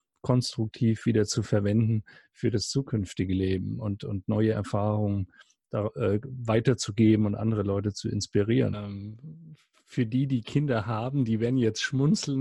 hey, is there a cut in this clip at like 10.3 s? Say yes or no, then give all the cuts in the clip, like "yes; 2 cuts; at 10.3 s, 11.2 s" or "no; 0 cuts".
no; 1 cut; at 8.7 s